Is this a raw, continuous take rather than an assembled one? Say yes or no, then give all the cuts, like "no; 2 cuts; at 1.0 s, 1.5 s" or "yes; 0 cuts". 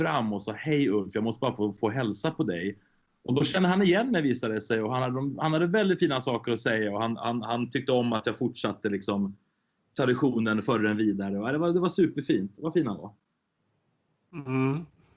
yes; 0 cuts